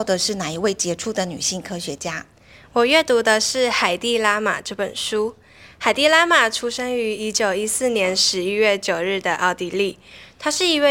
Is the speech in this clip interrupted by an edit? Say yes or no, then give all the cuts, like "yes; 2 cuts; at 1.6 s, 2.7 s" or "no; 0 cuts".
no; 0 cuts